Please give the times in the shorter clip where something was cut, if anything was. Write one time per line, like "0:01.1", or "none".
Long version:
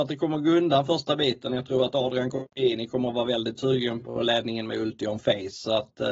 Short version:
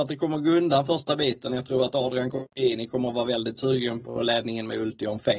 none